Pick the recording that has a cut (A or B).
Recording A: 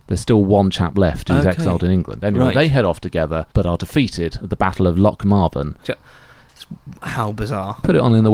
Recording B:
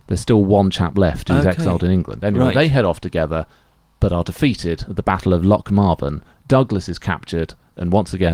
A